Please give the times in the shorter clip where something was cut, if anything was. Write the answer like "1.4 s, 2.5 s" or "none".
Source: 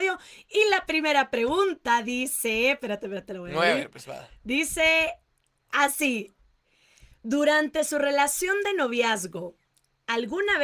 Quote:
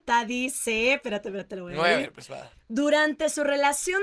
2.5 s